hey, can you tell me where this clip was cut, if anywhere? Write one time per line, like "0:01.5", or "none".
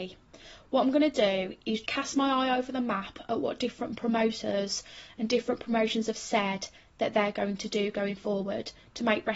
0:01.8